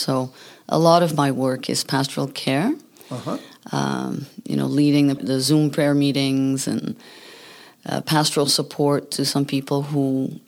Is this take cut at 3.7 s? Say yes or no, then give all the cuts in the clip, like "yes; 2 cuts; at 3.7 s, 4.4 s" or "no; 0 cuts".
no; 2 cuts; at 5.2 s, 8.0 s